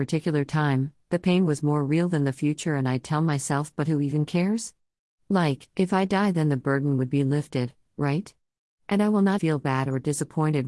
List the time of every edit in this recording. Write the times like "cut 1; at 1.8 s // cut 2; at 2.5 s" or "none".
cut 1; at 9.4 s

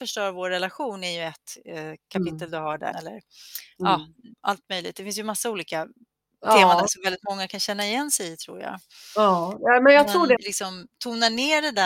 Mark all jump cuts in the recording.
cut 1; at 2.9 s // cut 2; at 4.3 s // cut 3; at 10.4 s

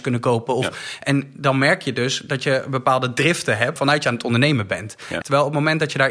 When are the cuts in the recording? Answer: cut 1; at 3.8 s // cut 2; at 5.2 s

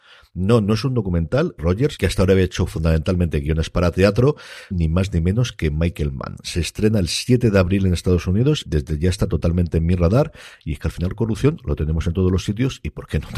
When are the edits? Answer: cut 1; at 1.6 s // cut 2; at 4.7 s // cut 3; at 8.7 s

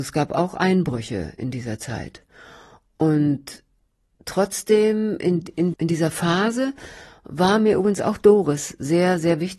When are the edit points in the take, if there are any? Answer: cut 1; at 5.7 s

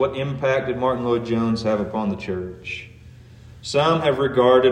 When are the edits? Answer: none

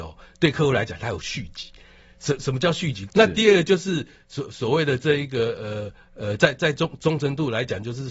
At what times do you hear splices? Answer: cut 1; at 3.1 s

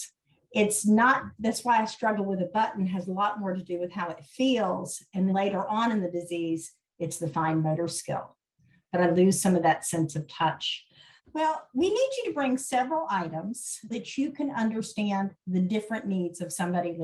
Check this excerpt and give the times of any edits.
cut 1; at 5.3 s // cut 2; at 11.2 s // cut 3; at 13.9 s

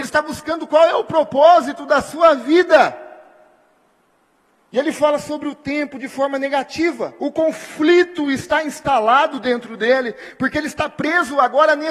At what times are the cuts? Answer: cut 1; at 7.2 s

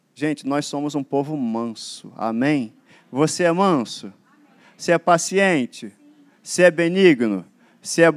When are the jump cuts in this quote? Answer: none

